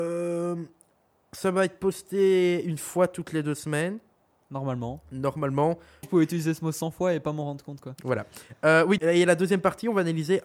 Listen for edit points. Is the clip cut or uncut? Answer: cut